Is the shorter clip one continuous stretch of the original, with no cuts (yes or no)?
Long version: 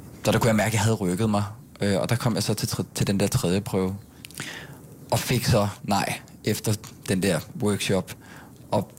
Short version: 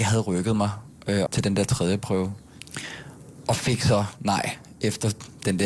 no